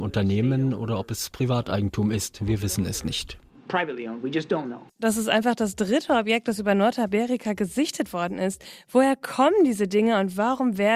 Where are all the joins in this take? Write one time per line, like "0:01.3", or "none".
0:04.9

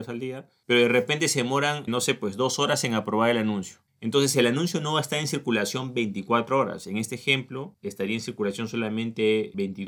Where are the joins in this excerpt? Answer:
0:01.9

